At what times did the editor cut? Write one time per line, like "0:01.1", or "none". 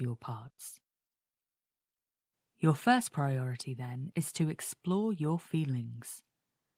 none